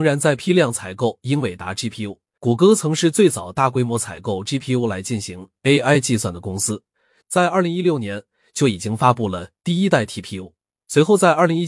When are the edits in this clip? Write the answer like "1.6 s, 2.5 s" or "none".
2.4 s, 7.2 s